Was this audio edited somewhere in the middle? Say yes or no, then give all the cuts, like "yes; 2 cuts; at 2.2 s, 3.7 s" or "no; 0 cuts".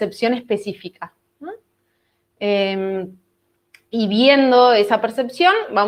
no; 0 cuts